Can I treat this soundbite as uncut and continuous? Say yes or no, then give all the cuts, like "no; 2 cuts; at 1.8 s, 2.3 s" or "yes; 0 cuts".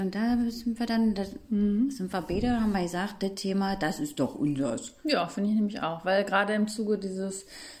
yes; 0 cuts